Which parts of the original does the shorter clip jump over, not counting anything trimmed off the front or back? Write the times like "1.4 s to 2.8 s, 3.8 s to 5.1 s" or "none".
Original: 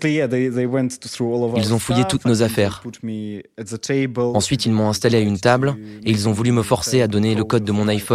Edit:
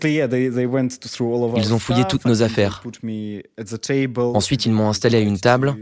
none